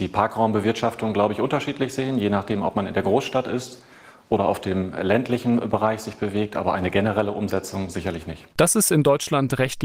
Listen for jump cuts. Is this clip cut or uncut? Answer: uncut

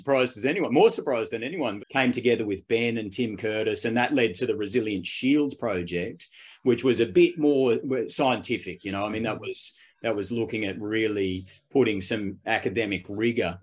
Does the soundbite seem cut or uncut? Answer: cut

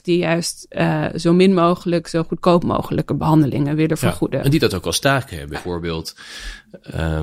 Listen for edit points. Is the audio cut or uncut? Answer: cut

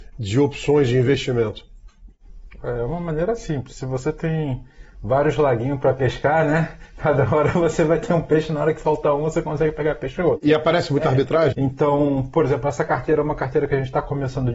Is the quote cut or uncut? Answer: cut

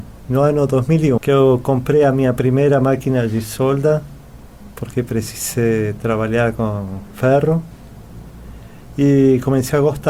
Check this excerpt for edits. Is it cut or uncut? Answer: cut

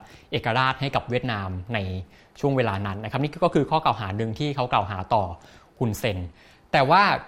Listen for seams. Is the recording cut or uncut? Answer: uncut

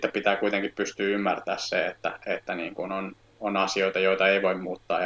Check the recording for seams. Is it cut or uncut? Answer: uncut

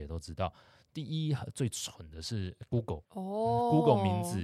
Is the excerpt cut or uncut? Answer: uncut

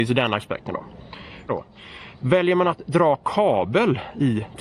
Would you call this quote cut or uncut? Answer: cut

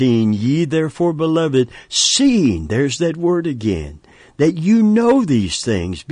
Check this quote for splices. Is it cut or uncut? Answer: uncut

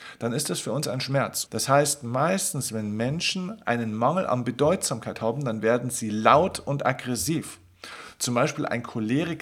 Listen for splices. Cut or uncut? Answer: cut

